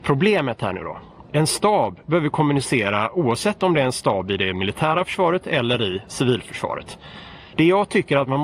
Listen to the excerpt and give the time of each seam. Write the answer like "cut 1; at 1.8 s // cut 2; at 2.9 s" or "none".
cut 1; at 7.5 s